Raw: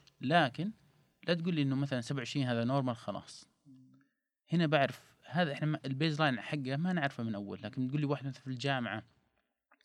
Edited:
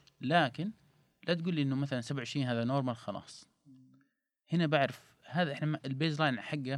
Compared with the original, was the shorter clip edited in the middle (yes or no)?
no